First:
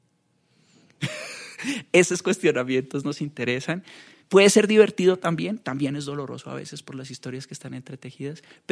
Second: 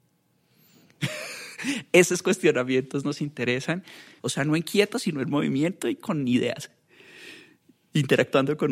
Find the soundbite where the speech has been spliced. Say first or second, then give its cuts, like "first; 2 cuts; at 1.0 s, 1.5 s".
second; 1 cut; at 4.2 s